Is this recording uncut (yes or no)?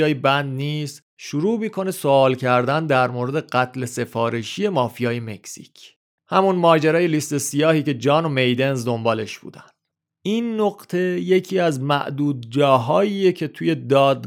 yes